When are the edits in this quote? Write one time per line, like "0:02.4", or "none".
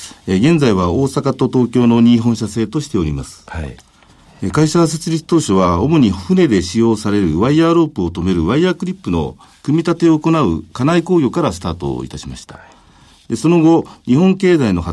none